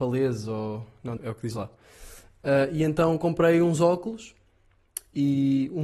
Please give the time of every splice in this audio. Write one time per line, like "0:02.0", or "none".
0:01.2